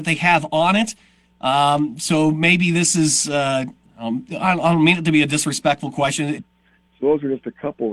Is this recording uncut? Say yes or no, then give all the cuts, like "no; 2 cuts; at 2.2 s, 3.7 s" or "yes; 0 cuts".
no; 1 cut; at 6.4 s